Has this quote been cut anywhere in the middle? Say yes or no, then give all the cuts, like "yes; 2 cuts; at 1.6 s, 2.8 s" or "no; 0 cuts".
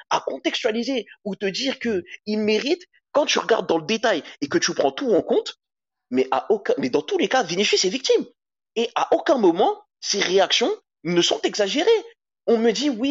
no; 0 cuts